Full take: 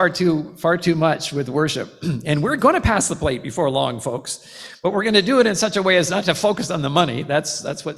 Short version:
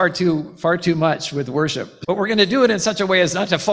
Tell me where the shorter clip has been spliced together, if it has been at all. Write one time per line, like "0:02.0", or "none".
0:02.0